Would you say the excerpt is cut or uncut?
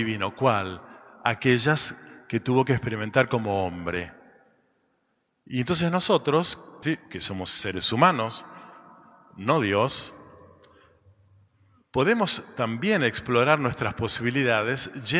cut